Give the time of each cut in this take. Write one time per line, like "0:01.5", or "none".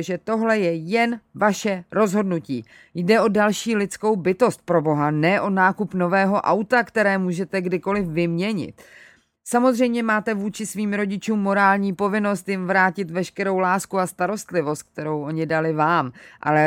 none